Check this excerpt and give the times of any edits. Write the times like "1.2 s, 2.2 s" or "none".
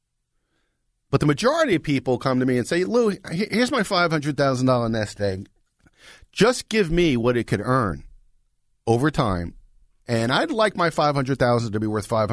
none